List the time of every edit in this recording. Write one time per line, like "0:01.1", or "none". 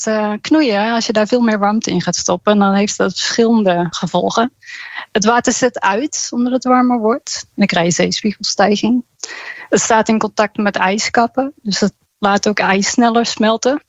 none